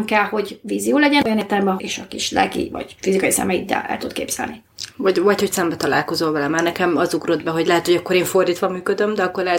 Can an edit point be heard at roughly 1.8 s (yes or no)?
yes